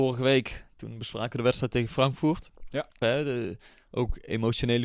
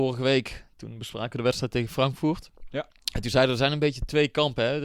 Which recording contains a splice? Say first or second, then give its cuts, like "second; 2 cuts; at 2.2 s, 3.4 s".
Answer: first; 1 cut; at 3.0 s